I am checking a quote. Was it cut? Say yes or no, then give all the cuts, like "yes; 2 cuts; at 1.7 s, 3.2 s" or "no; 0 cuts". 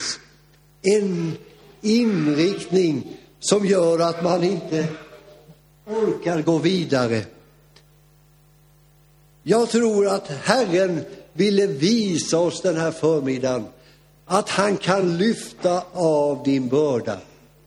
no; 0 cuts